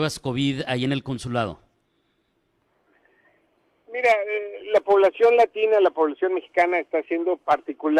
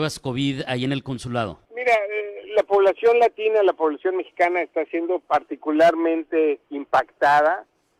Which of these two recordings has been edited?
second; 2 cuts; at 1.7 s, 6.6 s

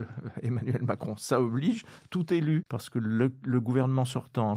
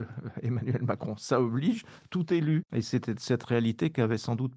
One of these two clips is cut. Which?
first; 1 cut; at 2.7 s

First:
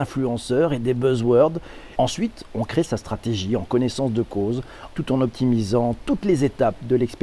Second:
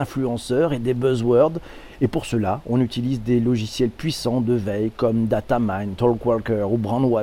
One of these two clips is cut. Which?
first; 2 cuts; at 2.0 s, 4.9 s

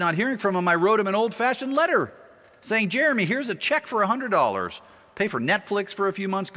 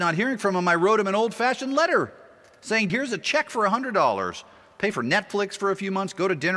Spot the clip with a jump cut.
second; 1 cut; at 2.9 s

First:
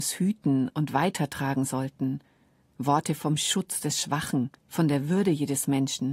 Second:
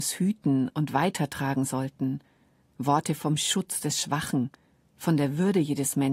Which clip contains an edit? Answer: first; 1 cut; at 4.6 s

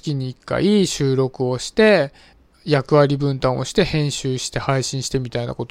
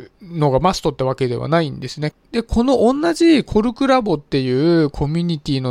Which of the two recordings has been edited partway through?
second; 1 cut; at 2.1 s

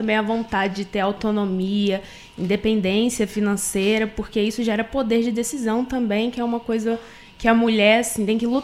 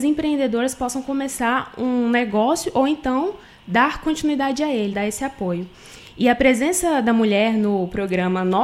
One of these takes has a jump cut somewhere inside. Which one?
second; 1 cut; at 4.9 s

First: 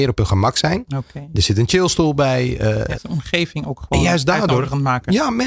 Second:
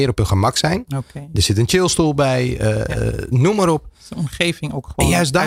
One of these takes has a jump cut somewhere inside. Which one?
first; 1 cut; at 2.9 s

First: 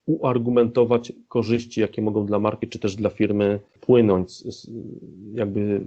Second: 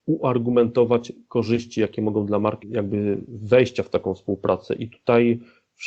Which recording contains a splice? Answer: second; 1 cut; at 2.6 s

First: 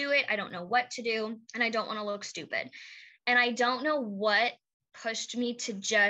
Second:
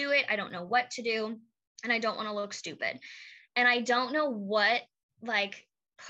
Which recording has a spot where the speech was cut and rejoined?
first; 2 cuts; at 1.4 s, 4.9 s

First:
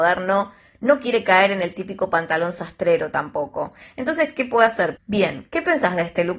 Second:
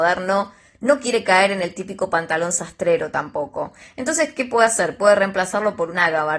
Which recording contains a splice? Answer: first; 1 cut; at 5.0 s

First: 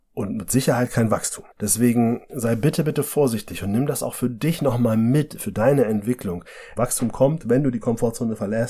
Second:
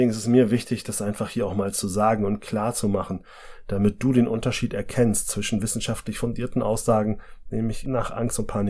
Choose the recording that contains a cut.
first; 2 cuts; at 1.5 s, 6.8 s

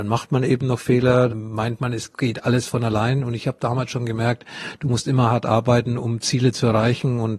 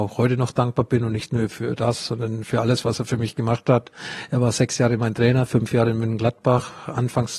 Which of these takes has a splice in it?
first; 1 cut; at 1.3 s

